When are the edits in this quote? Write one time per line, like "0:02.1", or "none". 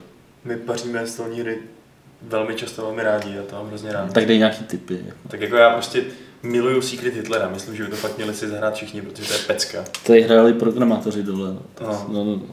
none